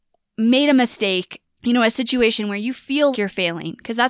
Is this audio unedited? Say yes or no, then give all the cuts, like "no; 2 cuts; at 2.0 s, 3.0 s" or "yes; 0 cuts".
no; 2 cuts; at 1.4 s, 3.1 s